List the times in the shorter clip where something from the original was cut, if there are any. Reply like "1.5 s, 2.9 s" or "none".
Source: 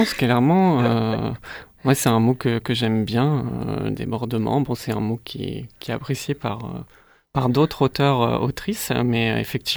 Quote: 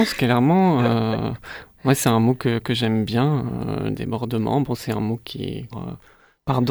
5.7 s